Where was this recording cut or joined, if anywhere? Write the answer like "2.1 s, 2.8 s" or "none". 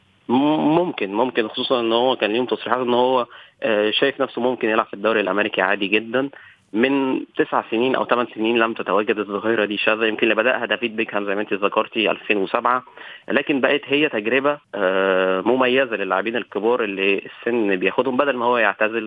14.6 s